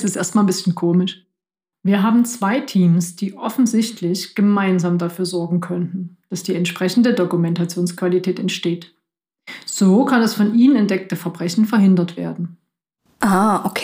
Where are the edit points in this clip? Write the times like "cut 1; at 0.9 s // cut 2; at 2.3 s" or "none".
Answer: cut 1; at 1.7 s